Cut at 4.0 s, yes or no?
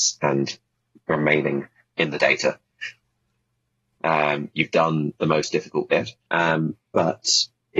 yes